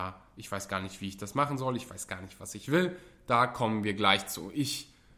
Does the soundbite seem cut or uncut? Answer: uncut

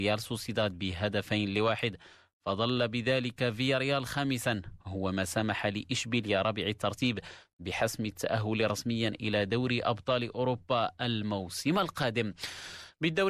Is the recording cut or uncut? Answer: uncut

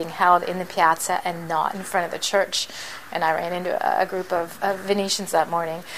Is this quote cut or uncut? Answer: uncut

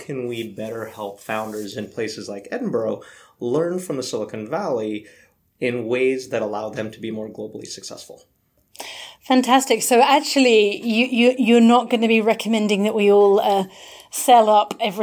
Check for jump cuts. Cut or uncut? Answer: uncut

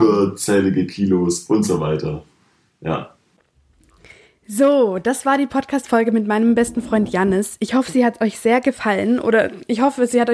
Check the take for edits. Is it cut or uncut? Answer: uncut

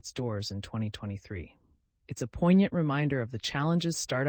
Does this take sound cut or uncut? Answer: uncut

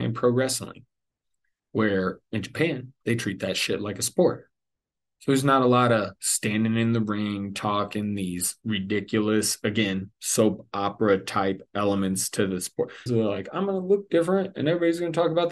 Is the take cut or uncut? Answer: cut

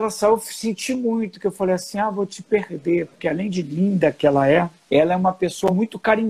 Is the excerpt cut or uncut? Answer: uncut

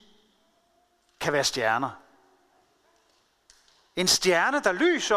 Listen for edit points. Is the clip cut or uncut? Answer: uncut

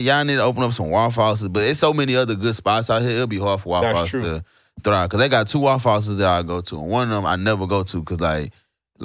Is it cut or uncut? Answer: uncut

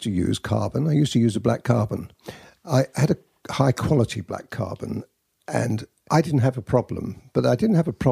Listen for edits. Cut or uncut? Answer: cut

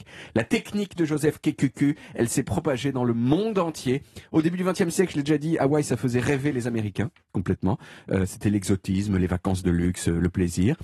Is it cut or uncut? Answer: uncut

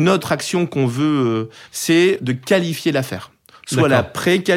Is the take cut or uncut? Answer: cut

